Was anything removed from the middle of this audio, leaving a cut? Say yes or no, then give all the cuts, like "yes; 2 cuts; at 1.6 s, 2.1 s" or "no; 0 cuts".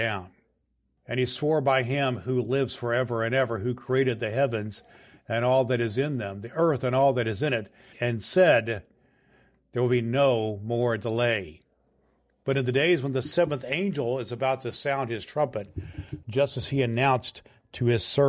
yes; 3 cuts; at 1.0 s, 7.9 s, 16.2 s